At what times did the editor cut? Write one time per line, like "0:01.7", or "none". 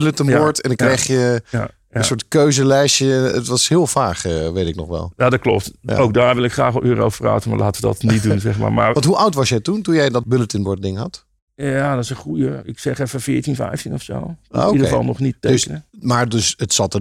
none